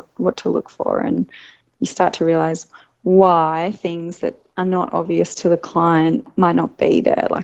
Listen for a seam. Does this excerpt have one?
no; 0 cuts

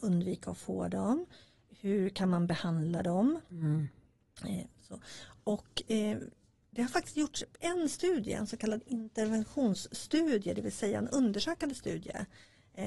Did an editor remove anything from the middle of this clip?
no; 0 cuts

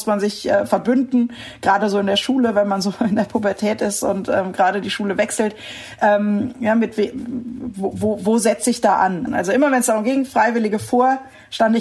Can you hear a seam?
yes; 1 cut; at 9.3 s

